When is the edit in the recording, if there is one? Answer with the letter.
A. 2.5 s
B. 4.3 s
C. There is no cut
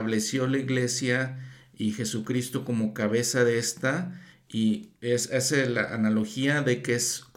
C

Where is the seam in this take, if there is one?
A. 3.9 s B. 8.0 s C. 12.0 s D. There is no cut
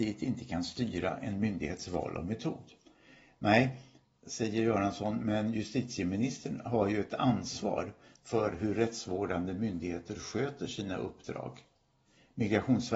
D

